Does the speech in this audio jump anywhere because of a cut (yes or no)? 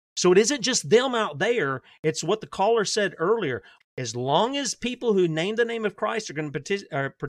yes